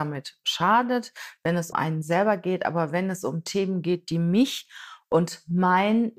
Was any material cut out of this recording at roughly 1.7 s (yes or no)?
yes